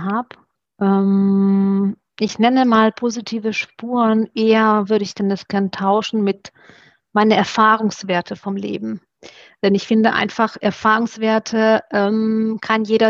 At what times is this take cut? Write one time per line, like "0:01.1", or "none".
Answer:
none